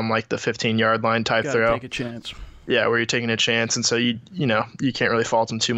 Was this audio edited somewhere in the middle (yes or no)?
no